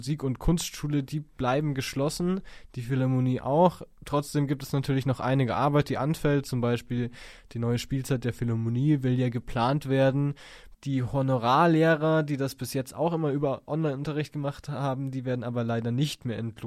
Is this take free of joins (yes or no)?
no